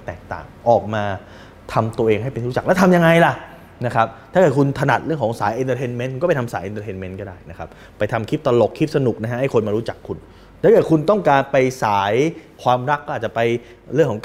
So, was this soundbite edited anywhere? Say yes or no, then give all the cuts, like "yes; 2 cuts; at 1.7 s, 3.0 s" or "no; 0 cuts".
no; 0 cuts